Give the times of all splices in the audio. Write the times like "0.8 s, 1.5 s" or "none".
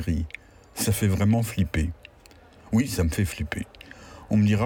none